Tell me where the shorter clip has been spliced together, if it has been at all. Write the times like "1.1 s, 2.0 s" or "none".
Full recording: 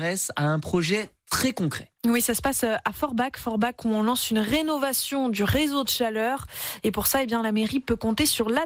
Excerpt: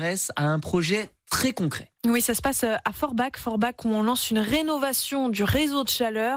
none